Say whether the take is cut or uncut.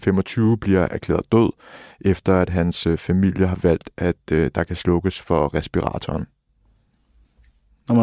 uncut